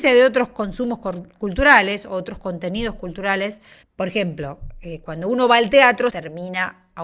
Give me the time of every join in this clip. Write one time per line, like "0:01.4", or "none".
0:03.8
0:06.1